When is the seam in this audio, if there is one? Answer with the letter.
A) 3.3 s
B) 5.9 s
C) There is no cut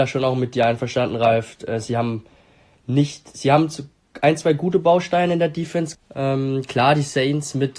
B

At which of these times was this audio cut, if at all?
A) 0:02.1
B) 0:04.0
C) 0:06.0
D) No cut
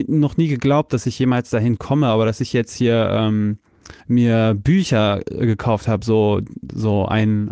B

